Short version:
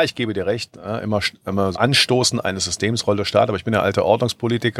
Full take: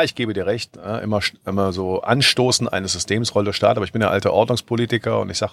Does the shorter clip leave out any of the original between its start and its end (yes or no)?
yes